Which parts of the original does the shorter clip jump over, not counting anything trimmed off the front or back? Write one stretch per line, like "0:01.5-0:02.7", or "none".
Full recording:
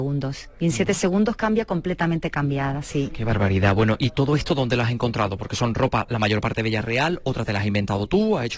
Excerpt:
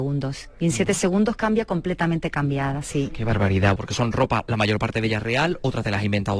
0:03.8-0:05.4